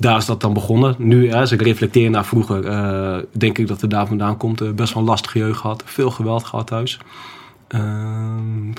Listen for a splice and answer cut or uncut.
uncut